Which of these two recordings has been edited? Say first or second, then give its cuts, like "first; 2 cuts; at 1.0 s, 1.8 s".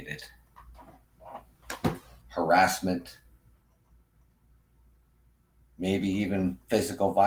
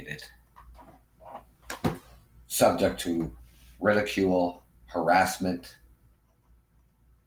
first; 1 cut; at 2.2 s